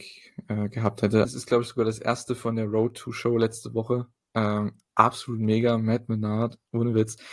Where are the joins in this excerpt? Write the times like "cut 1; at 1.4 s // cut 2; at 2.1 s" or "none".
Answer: cut 1; at 1.2 s

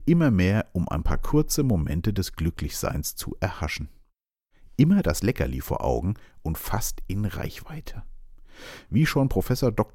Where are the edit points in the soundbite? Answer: none

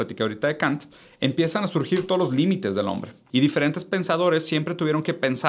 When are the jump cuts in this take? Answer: cut 1; at 3.3 s

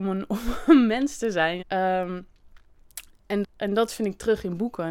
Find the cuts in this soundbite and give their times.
cut 1; at 1.6 s // cut 2; at 3.4 s

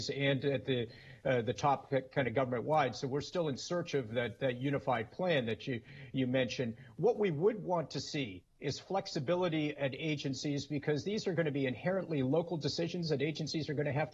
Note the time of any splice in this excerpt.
none

